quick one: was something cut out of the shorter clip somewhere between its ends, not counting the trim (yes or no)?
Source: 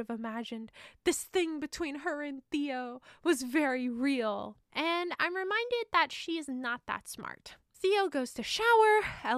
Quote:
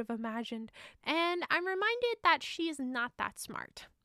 yes